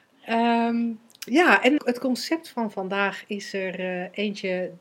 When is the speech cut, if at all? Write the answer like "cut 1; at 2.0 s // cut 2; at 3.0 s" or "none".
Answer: cut 1; at 1.8 s

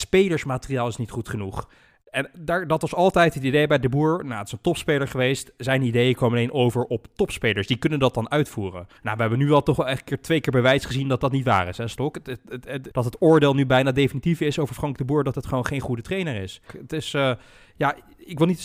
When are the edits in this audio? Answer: cut 1; at 9.0 s // cut 2; at 12.9 s // cut 3; at 16.7 s

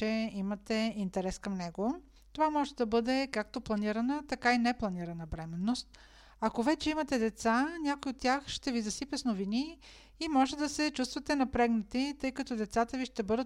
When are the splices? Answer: cut 1; at 2.2 s

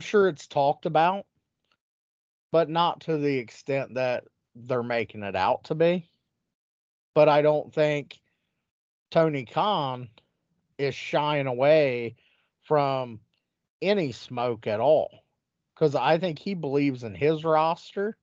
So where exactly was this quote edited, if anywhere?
none

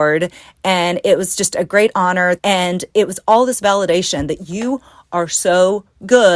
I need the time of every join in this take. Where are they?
cut 1; at 2.4 s

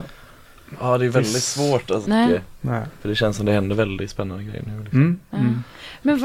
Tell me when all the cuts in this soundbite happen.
cut 1; at 2.1 s

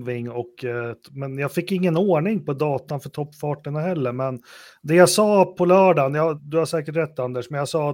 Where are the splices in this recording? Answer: cut 1; at 6.4 s

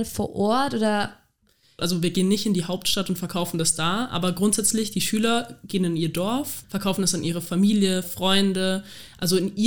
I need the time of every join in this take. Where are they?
cut 1; at 1.8 s // cut 2; at 6.6 s // cut 3; at 8.0 s

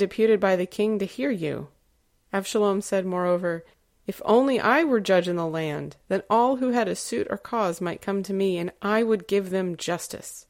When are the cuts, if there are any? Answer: none

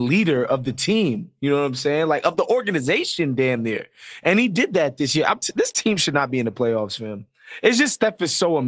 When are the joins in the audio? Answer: none

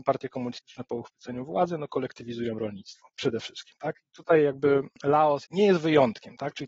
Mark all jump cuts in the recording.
none

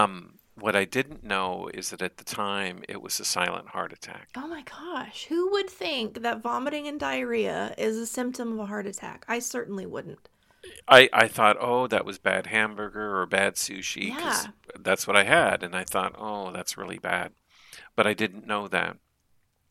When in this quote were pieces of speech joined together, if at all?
cut 1; at 10.8 s

